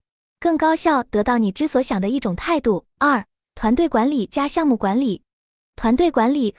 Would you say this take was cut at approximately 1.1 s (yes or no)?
no